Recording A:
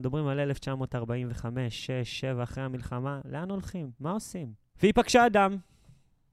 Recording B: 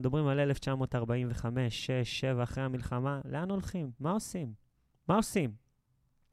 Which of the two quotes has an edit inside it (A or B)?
A